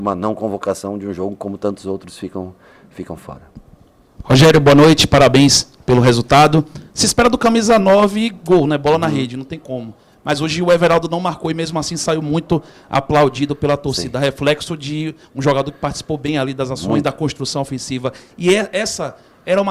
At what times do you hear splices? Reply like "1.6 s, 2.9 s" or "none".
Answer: none